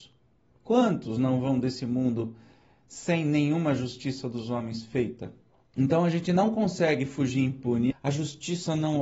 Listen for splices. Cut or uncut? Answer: cut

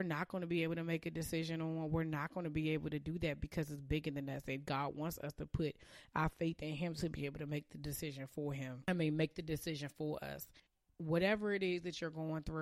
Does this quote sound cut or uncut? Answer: uncut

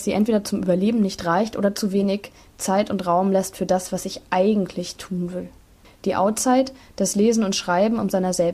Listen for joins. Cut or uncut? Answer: cut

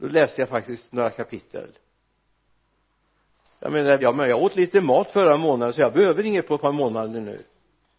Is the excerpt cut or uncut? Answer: cut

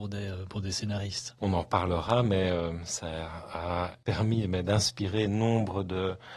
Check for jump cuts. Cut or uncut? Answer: cut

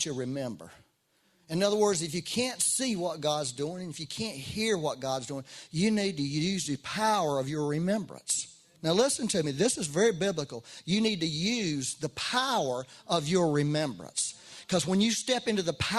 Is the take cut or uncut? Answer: cut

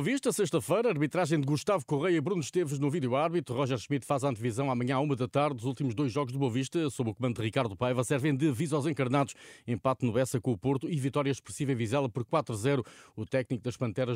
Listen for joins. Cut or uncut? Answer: uncut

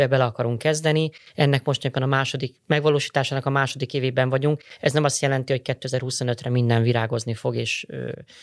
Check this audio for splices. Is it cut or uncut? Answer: uncut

